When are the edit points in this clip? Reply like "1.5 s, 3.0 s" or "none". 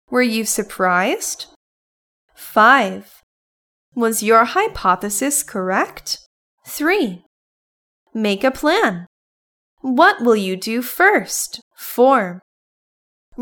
3.7 s, 6.6 s, 11.7 s